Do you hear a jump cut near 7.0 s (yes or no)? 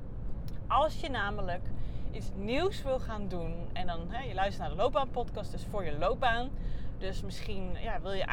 no